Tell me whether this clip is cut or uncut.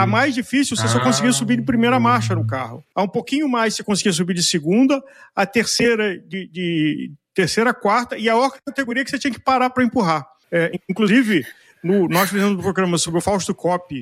uncut